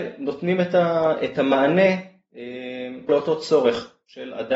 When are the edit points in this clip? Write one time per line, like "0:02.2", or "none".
0:03.1